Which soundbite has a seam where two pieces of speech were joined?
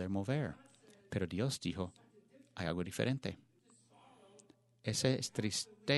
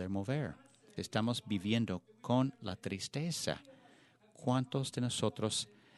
second; 1 cut; at 1.0 s

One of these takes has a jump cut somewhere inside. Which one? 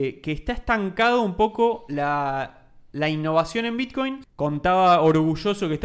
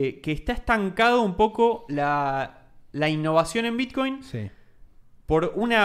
first; 1 cut; at 4.2 s

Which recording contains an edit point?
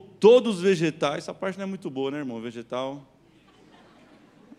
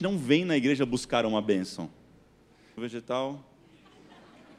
second; 1 cut; at 2.8 s

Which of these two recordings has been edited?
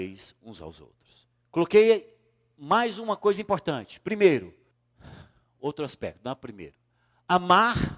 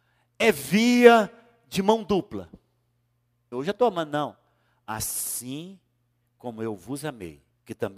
second; 1 cut; at 3.5 s

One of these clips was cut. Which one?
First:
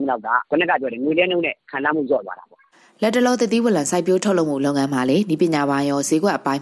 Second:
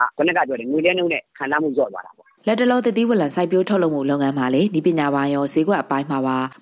second; 1 cut; at 2.4 s

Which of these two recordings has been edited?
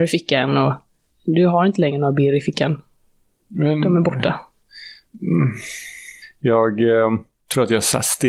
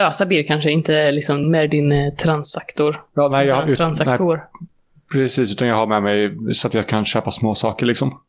second; 1 cut; at 1.4 s

